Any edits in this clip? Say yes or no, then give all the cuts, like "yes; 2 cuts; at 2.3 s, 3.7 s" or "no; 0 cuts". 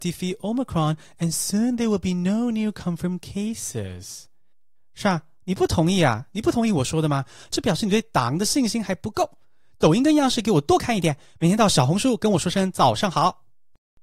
no; 0 cuts